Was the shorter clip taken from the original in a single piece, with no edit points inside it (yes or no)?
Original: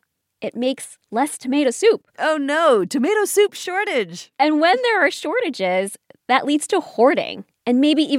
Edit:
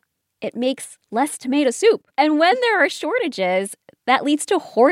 no